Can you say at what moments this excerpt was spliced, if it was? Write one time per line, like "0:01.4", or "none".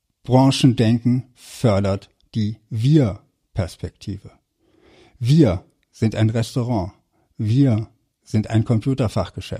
none